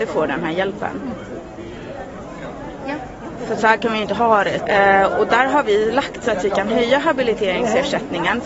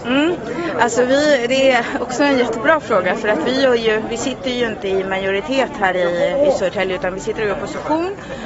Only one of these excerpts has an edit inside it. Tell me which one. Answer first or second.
first